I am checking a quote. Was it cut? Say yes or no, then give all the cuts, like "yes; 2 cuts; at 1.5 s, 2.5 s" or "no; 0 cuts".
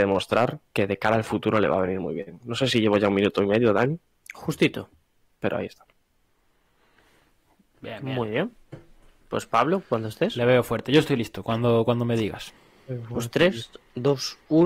no; 0 cuts